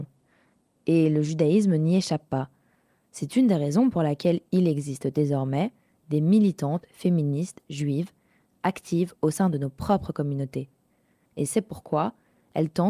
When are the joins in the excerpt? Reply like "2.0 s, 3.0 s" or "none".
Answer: 11.3 s